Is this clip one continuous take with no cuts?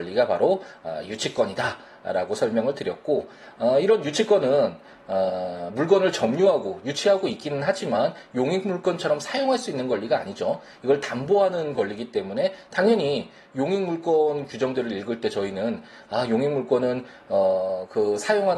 yes; 0 cuts

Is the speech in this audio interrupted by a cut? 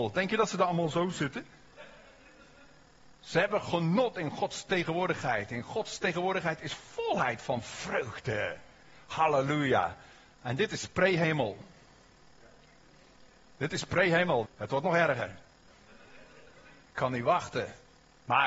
yes; 2 cuts; at 14.4 s, 16.8 s

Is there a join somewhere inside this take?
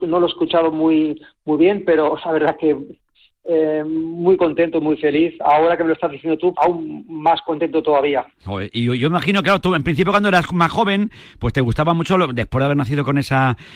yes; 1 cut; at 6.5 s

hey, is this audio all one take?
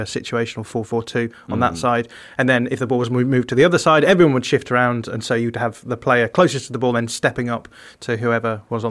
yes; 0 cuts

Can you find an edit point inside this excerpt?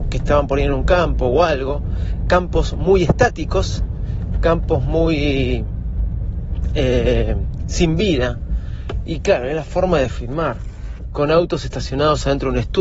no; 0 cuts

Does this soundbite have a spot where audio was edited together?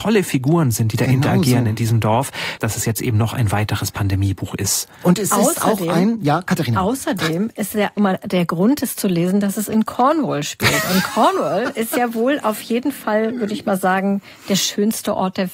yes; 2 cuts; at 2.6 s, 8.0 s

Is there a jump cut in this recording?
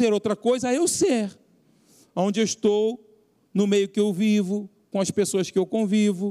no; 0 cuts

